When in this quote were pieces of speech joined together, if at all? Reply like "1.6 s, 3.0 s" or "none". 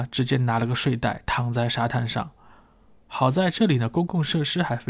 none